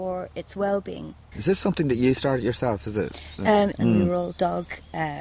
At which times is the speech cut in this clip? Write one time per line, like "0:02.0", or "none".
0:01.3
0:03.7